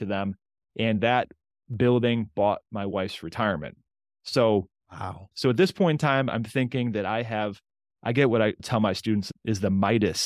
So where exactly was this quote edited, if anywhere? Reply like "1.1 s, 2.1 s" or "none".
5.3 s